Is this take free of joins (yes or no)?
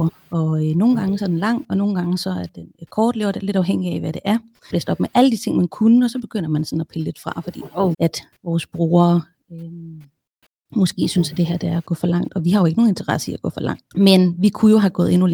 no